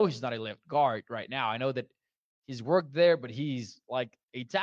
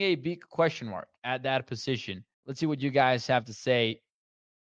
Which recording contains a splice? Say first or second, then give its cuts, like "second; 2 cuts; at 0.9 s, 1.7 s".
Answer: second; 1 cut; at 2.3 s